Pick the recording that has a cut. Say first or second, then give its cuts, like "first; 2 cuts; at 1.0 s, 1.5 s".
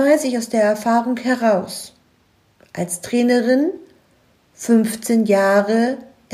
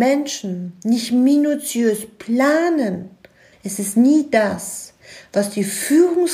second; 1 cut; at 3.5 s